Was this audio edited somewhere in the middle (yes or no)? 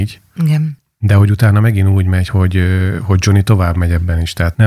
no